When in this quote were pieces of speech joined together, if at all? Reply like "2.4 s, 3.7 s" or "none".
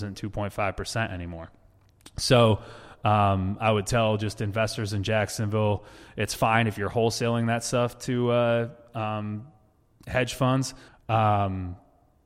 10.9 s